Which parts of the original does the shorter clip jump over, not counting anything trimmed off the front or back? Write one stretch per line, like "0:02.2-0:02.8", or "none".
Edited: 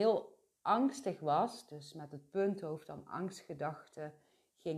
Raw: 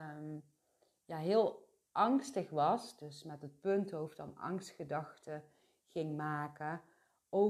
none